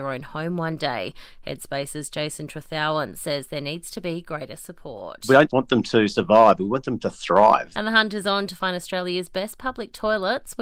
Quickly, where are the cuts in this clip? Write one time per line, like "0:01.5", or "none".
0:05.5
0:07.7